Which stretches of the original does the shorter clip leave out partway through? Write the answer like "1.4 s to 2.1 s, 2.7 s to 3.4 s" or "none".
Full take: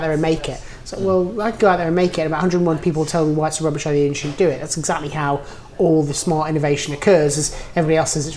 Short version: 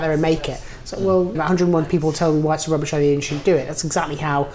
1.3 s to 2.3 s